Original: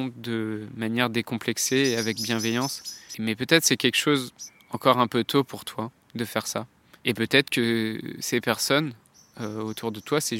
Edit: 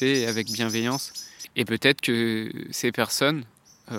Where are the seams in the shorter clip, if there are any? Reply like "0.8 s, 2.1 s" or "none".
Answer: 1.5 s